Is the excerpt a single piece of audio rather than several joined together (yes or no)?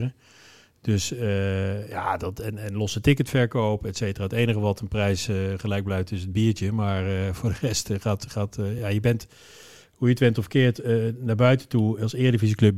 yes